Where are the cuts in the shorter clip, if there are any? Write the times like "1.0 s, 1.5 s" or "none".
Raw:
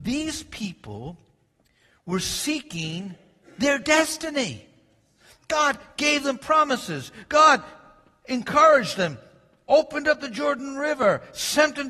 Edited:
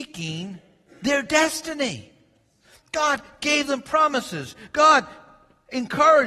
none